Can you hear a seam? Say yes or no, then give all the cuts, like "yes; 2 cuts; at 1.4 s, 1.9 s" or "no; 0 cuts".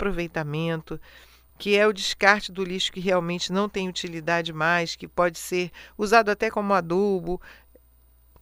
yes; 1 cut; at 1.5 s